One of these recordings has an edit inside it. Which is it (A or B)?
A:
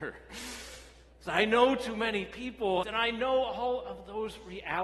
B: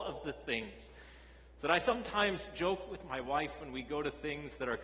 A